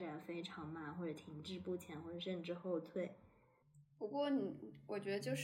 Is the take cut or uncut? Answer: uncut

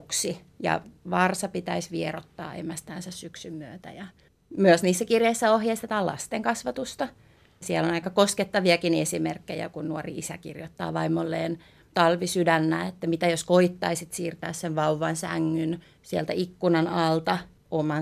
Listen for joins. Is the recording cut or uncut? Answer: uncut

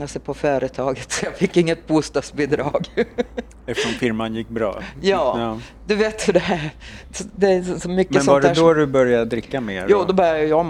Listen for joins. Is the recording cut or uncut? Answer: uncut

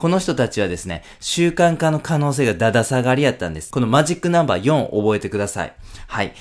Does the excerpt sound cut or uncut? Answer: cut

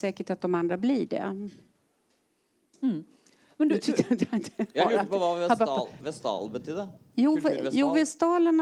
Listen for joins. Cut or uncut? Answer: uncut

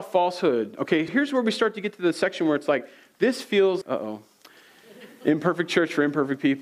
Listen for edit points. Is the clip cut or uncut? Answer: cut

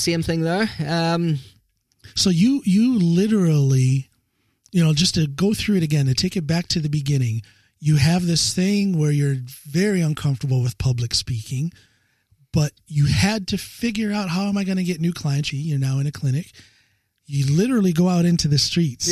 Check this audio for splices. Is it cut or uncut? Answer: cut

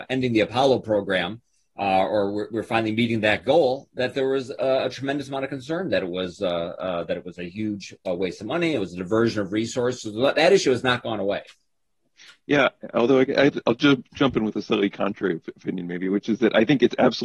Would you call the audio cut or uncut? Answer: uncut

